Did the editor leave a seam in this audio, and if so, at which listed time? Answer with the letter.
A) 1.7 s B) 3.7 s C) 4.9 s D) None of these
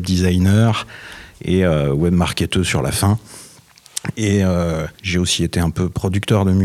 C